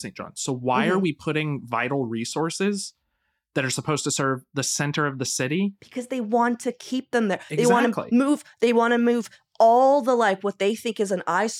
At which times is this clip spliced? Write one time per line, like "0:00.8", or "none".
none